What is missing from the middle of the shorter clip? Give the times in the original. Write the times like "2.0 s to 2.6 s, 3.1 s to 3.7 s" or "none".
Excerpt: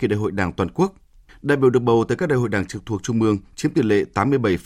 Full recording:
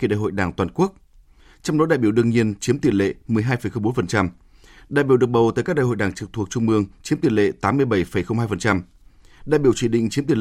1.3 s to 4.8 s

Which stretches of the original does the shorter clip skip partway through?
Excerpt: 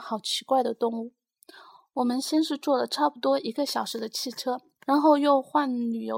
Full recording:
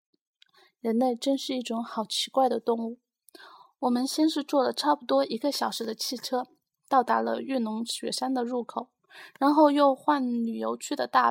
6.7 s to 9.3 s

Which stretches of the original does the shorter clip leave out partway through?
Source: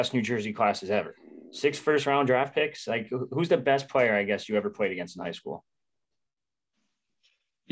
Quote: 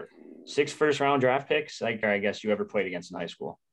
3.1 s to 4.1 s

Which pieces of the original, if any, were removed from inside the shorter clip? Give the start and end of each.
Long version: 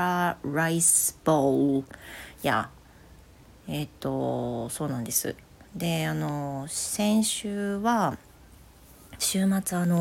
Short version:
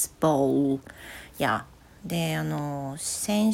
3.0 s to 5.7 s

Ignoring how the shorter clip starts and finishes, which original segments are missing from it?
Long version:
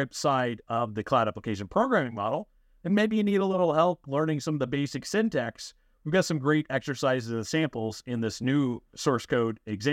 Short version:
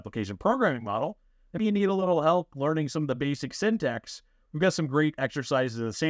2.9 s to 3.1 s

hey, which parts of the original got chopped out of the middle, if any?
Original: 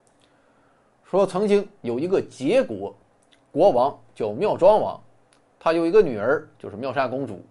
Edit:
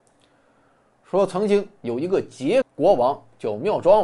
2.6 s to 3.4 s

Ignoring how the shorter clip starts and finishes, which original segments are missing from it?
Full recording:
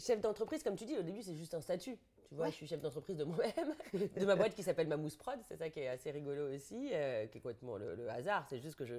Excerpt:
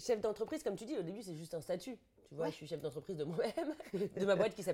none

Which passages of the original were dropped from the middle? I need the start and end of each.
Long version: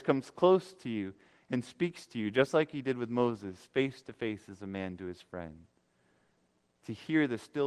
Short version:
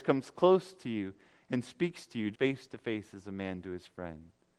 2.3 s to 3.7 s

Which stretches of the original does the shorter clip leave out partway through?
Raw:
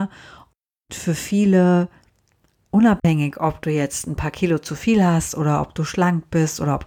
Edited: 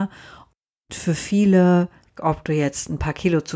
2.2 s to 3.3 s

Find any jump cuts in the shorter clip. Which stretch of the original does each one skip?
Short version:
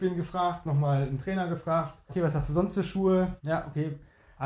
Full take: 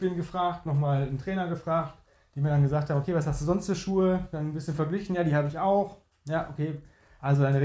2.1 s to 3.0 s, 4.3 s to 6.2 s

